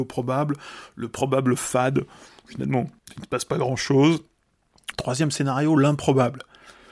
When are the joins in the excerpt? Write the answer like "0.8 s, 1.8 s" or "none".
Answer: 3.0 s, 4.9 s